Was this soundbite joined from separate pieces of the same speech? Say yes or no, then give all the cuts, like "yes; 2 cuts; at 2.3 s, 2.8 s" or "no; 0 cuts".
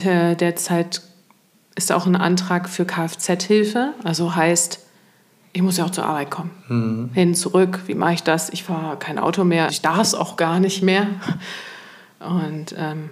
yes; 1 cut; at 9.7 s